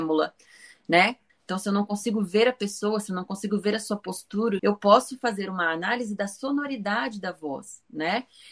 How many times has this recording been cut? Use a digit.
2